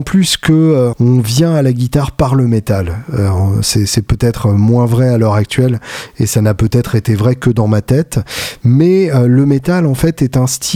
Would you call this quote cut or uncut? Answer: cut